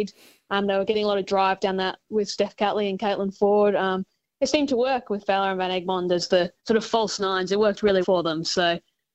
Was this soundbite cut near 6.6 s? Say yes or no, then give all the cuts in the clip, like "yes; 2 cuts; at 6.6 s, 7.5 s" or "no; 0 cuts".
yes; 3 cuts; at 2.1 s, 6.6 s, 8.0 s